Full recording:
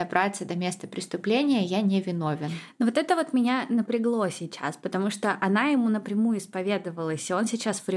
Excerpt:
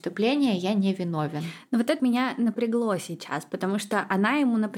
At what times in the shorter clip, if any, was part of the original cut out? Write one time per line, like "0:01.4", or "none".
0:02.0